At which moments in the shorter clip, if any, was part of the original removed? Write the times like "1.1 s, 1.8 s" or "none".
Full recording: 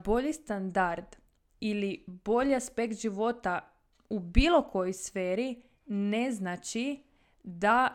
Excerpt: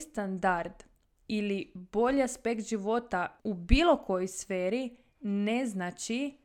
3.4 s

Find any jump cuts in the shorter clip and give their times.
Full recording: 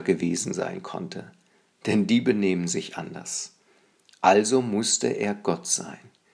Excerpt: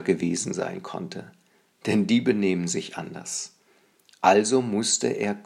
none

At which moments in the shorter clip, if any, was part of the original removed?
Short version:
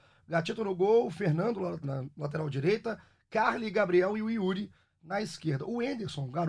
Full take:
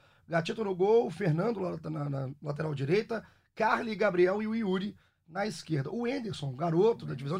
1.8 s

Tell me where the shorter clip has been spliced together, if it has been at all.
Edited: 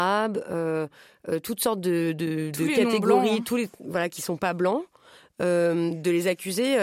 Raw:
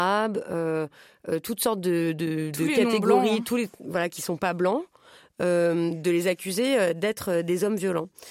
none

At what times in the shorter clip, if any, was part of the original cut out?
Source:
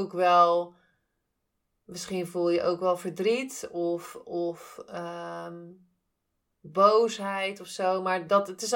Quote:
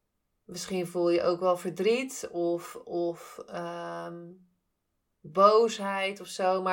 none

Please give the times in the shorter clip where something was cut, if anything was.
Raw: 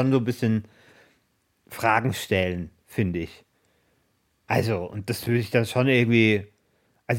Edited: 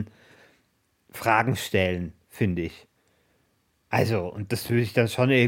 none

